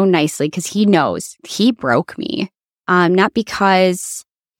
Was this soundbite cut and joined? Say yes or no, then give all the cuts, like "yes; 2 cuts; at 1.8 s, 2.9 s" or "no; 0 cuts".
yes; 2 cuts; at 1.4 s, 2.7 s